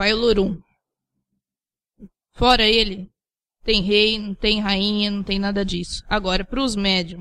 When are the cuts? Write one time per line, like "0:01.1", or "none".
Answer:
none